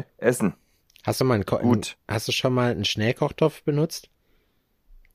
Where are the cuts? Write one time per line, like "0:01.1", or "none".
0:01.2